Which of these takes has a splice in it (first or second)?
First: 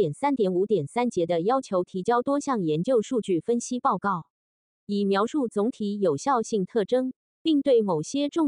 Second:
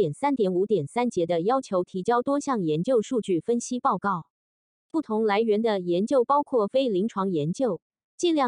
first